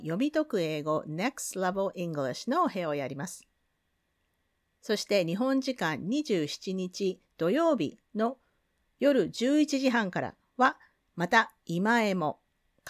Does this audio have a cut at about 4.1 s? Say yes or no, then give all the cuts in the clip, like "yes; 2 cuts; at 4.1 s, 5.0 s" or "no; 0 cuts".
no; 0 cuts